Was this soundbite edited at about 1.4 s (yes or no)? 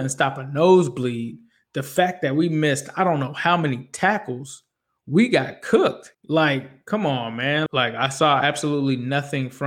no